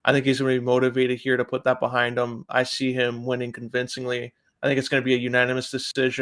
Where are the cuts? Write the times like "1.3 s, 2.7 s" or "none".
none